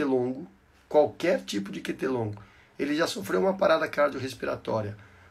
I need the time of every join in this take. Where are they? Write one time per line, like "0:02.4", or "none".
none